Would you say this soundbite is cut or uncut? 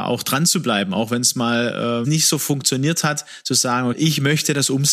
cut